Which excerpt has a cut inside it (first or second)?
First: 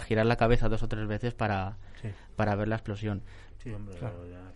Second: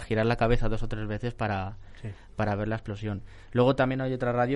first